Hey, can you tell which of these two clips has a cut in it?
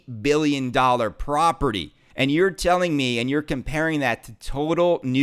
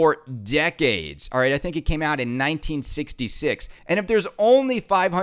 second; 1 cut; at 3.8 s

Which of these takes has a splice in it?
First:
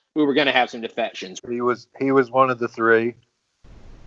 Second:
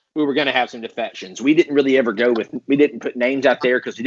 first; 1 cut; at 1.4 s

